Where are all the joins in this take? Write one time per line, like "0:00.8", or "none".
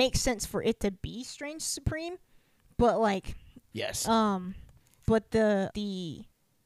0:03.7
0:05.7